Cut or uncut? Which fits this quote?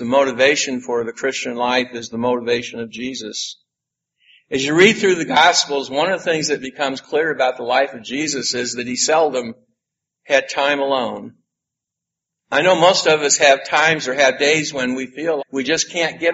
cut